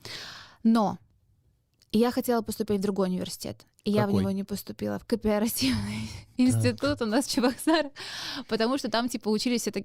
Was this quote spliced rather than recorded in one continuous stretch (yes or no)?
no